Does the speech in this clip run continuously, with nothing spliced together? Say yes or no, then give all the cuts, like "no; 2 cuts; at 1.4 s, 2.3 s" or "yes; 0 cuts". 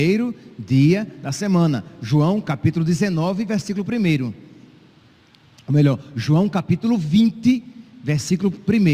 yes; 0 cuts